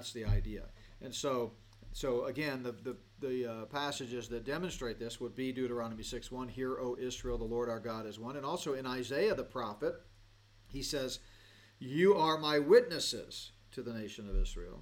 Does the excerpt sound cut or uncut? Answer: uncut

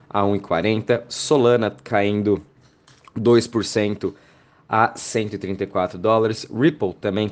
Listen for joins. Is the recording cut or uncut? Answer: uncut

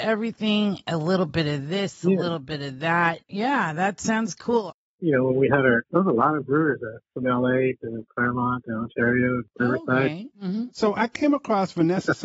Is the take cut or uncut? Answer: cut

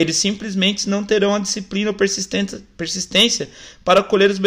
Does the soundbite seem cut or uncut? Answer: uncut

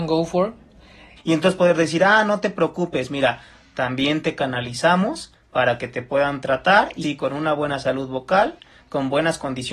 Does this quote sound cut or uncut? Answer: cut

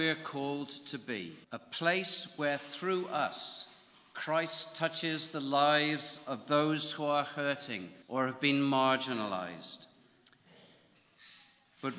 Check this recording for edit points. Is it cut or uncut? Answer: cut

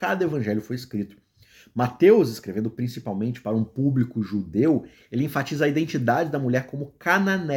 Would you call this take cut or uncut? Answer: uncut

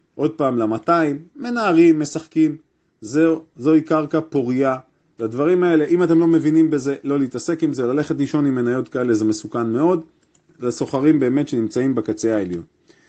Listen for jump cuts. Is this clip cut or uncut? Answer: uncut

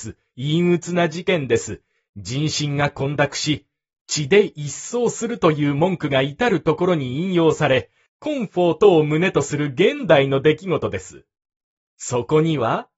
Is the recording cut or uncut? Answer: cut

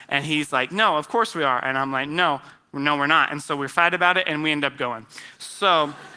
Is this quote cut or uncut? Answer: uncut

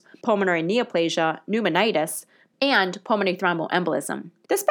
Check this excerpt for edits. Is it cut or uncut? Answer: cut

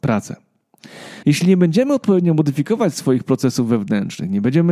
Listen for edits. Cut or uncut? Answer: cut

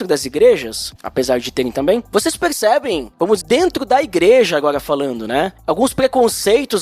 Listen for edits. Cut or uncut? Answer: cut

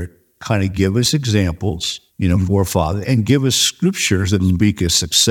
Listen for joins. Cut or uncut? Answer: cut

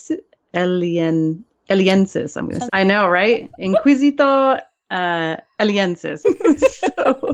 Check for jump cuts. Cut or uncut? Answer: cut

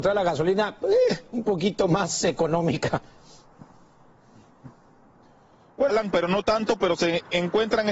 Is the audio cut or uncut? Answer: cut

